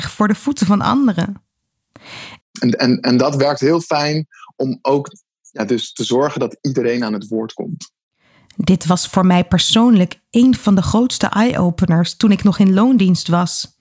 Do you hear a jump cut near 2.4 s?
yes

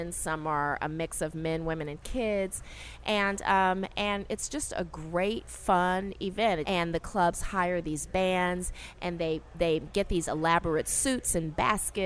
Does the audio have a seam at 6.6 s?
yes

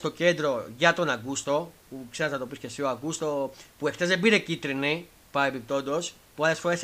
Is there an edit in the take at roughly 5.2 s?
no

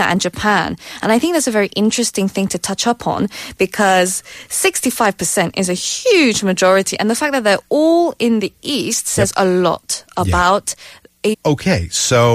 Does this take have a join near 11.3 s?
yes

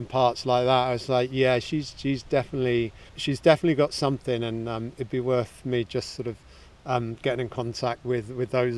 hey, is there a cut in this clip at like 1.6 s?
no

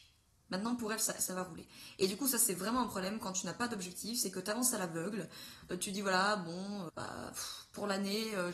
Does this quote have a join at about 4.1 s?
no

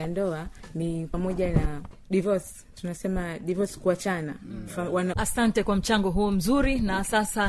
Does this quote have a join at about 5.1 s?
yes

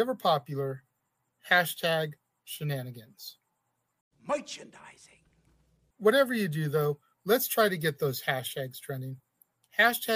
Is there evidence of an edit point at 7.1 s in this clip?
yes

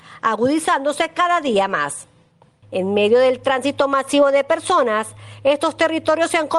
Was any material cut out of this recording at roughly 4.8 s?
no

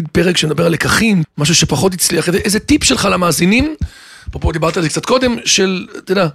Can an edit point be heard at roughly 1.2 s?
yes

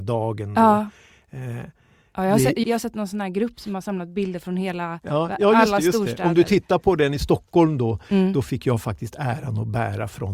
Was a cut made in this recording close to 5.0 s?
no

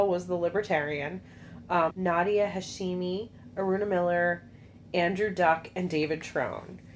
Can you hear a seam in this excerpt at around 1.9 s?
yes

